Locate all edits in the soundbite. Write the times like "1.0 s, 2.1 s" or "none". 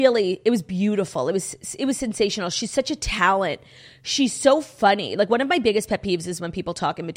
none